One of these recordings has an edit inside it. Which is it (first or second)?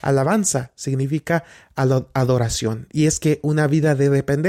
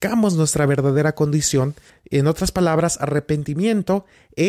second